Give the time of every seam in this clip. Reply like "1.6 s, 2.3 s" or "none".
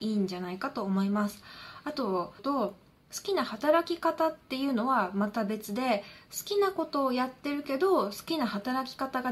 2.4 s